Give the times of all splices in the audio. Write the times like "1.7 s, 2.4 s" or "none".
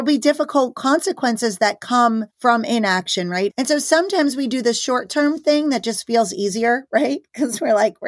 2.3 s, 3.5 s